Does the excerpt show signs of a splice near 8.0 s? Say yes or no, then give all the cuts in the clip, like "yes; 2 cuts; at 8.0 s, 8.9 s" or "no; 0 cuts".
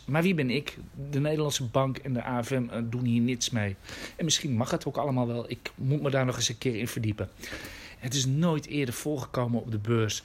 yes; 1 cut; at 8.0 s